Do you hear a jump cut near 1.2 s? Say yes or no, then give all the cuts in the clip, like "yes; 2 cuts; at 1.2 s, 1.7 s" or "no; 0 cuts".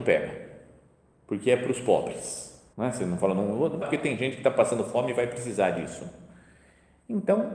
no; 2 cuts; at 2.7 s, 3.8 s